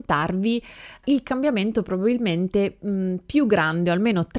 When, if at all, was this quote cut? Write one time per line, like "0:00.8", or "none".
0:01.0